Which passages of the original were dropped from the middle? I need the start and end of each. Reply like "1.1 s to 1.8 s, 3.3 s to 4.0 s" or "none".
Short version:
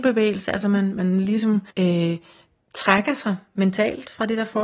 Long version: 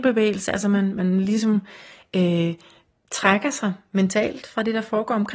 1.7 s to 2.1 s